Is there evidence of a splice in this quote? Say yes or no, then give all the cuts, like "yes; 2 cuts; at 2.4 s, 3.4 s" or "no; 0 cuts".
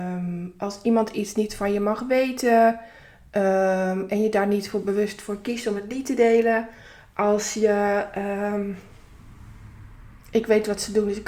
no; 0 cuts